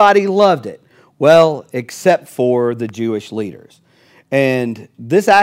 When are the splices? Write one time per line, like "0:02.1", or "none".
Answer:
none